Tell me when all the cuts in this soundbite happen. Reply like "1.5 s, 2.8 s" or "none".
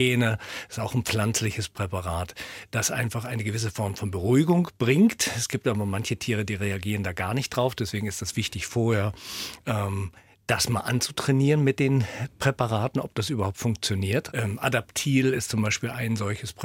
14.3 s